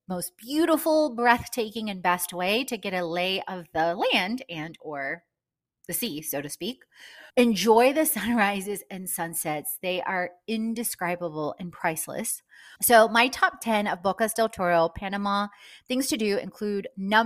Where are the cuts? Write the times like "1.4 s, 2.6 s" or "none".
7.3 s, 12.8 s